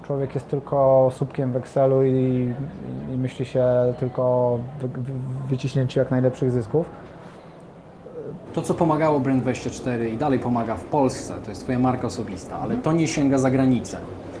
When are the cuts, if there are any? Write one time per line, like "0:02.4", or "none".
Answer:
0:08.5